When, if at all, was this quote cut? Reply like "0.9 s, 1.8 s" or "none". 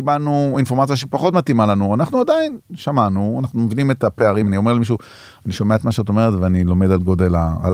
none